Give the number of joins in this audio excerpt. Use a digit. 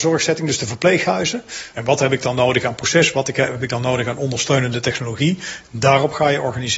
1